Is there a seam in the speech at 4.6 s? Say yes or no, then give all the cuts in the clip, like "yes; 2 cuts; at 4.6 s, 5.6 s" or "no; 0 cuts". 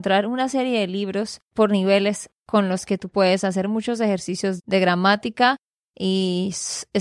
yes; 1 cut; at 4.6 s